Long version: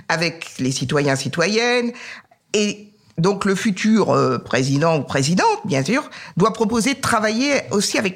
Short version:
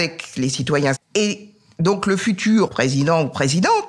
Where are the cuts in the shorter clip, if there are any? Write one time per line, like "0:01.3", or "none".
0:00.9
0:02.7

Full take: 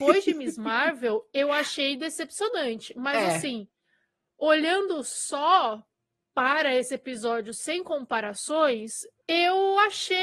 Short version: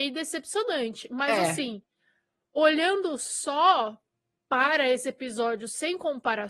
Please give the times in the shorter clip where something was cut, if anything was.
none

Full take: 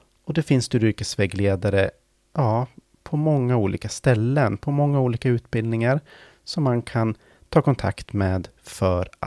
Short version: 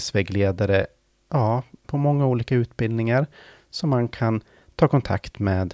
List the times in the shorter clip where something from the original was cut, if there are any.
0:01.8

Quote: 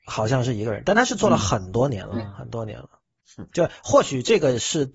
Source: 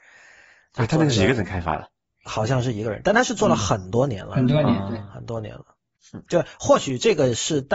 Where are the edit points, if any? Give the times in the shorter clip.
0:02.1

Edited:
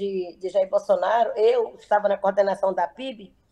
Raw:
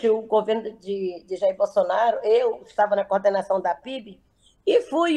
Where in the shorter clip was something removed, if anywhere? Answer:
none

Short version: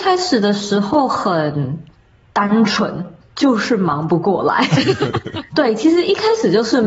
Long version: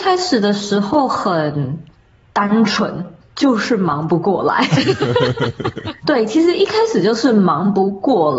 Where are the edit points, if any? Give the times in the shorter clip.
0:05.1

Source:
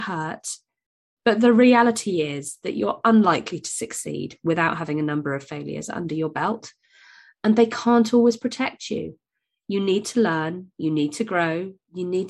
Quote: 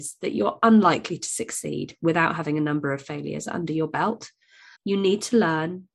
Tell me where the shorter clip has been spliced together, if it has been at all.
0:04.8

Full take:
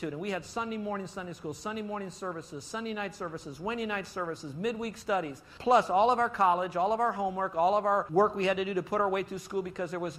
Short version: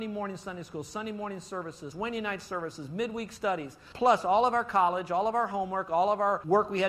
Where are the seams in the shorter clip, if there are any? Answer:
0:01.9

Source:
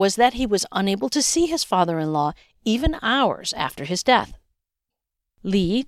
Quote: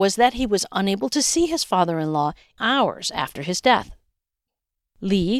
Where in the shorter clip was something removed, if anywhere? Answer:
0:02.6

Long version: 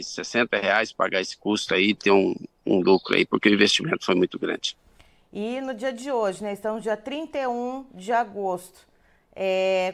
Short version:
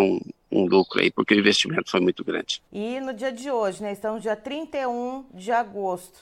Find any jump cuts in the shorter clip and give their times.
0:02.7

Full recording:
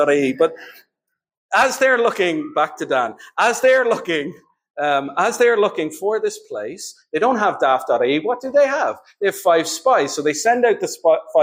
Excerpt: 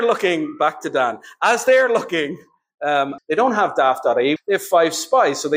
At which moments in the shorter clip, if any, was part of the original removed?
0:03.2
0:04.4

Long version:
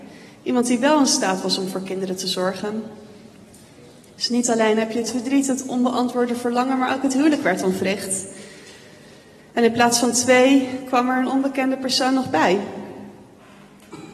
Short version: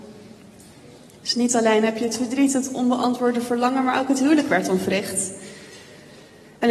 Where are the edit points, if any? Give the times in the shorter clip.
none

